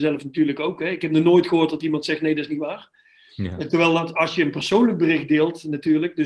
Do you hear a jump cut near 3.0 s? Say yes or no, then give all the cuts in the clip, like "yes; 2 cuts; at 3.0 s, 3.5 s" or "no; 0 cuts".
no; 0 cuts